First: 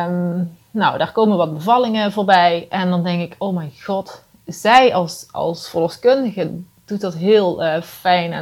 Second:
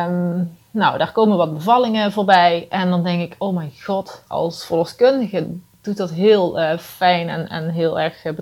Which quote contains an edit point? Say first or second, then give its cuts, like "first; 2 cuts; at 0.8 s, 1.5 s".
second; 1 cut; at 4.3 s